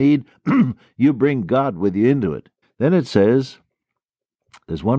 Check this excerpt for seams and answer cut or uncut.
cut